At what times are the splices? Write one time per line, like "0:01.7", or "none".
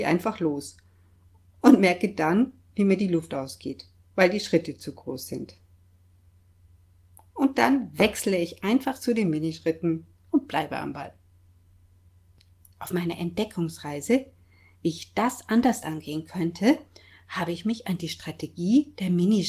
0:12.7

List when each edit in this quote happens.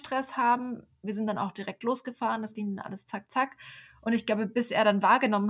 none

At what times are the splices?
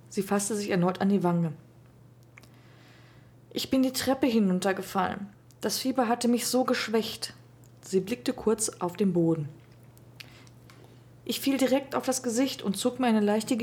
none

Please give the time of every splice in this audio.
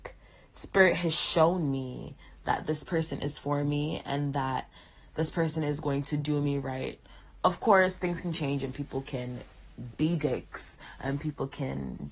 none

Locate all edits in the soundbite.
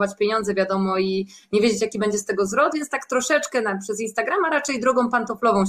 none

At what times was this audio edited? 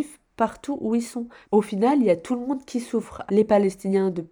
0:01.4
0:03.3

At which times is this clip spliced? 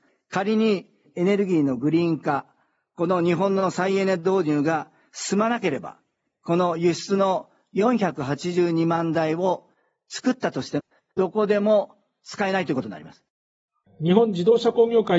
0:06.2
0:13.9

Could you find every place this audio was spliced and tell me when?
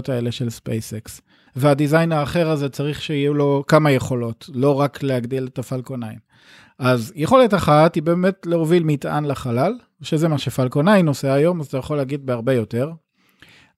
0:01.5

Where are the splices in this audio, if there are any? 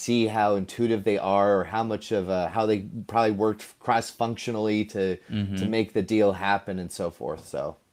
none

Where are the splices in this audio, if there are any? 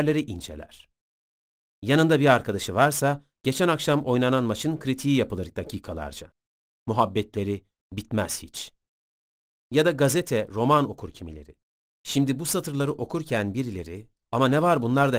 0:06.8
0:11.9

